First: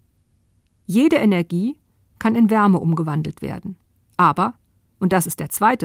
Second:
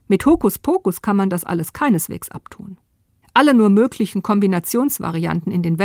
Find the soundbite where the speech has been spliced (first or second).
second